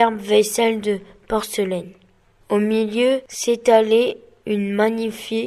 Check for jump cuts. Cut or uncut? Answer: uncut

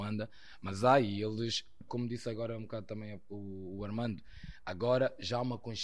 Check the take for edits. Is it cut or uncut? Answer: cut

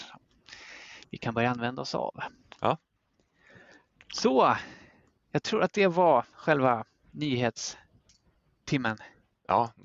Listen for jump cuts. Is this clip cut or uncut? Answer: uncut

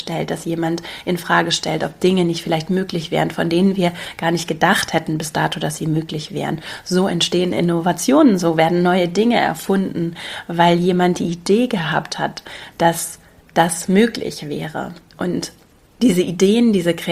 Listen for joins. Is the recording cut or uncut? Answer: uncut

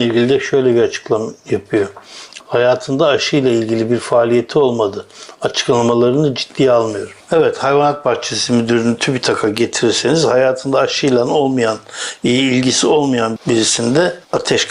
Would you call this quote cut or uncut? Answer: cut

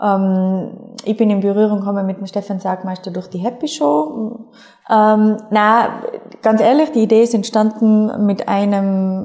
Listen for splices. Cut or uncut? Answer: cut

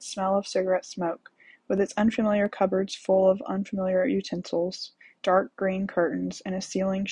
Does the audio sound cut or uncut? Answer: cut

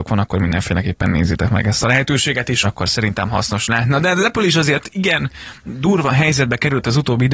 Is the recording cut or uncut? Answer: cut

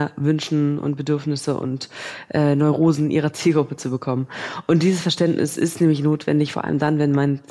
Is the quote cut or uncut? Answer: uncut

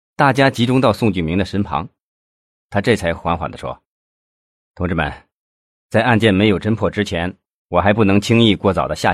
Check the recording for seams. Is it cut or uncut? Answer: uncut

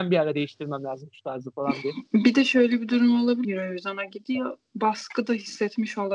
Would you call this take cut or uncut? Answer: cut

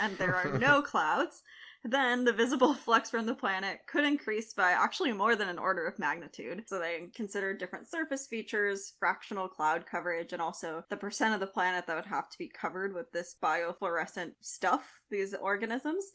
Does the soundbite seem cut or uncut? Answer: cut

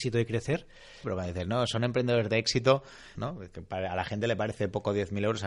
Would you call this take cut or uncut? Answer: cut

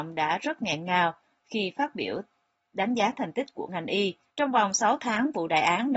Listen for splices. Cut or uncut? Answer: cut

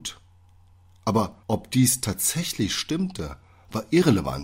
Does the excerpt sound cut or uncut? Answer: cut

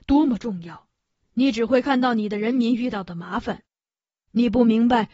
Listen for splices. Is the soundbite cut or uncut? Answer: uncut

